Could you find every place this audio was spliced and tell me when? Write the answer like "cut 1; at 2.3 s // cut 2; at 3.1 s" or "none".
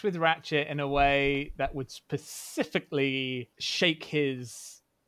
cut 1; at 3.5 s